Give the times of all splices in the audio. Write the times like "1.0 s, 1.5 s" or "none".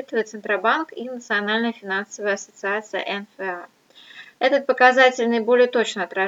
none